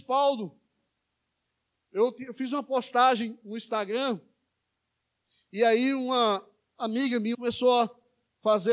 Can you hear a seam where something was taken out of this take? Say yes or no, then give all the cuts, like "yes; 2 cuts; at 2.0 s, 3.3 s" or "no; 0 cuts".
yes; 1 cut; at 7.3 s